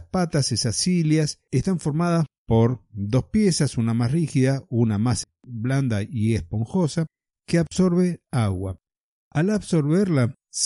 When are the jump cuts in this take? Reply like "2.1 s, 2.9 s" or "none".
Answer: none